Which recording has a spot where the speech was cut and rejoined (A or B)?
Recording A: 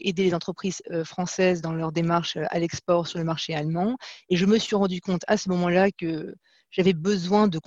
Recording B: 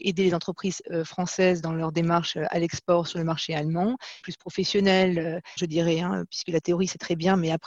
B